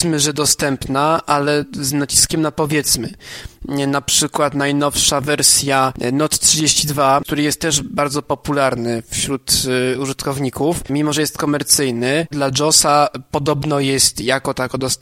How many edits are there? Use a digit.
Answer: 2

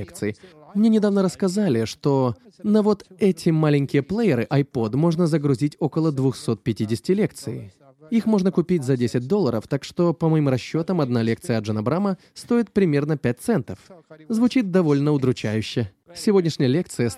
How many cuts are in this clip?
1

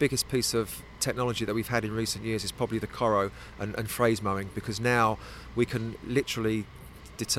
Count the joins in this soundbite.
0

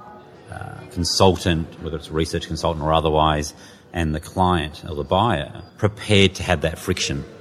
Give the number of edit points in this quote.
1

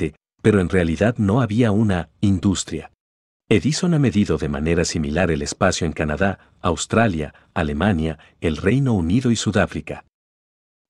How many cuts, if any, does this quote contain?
1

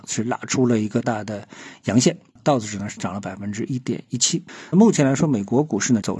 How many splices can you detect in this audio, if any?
2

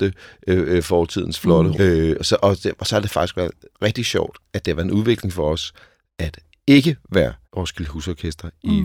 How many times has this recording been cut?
2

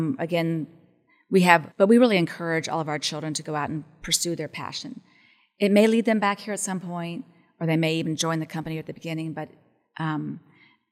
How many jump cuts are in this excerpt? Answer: 1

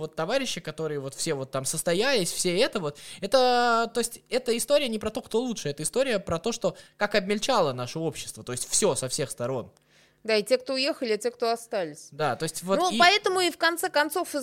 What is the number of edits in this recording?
0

